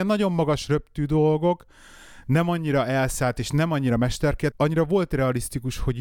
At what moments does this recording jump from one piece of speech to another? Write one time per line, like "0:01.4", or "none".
0:04.5